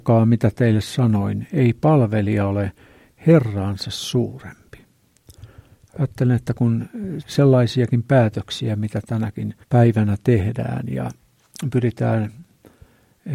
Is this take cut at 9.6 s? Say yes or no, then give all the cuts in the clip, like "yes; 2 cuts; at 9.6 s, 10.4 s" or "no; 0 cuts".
yes; 2 cuts; at 7.2 s, 9.6 s